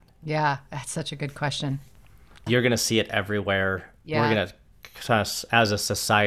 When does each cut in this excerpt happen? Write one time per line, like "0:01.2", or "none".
0:02.5